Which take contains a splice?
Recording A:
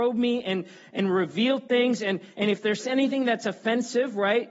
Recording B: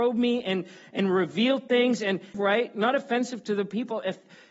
B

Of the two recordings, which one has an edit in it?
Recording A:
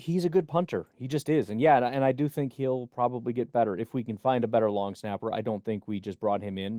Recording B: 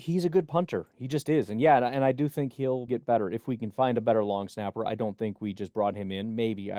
B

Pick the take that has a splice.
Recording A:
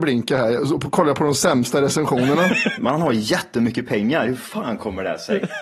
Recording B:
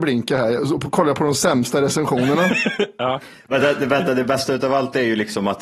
A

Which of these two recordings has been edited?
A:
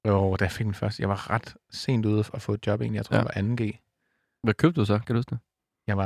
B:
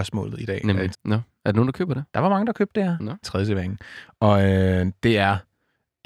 B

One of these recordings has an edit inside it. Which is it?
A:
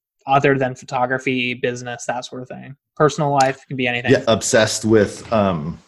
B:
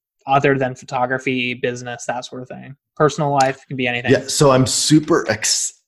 A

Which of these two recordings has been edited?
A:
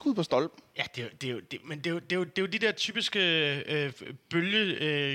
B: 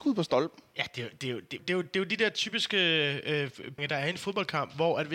B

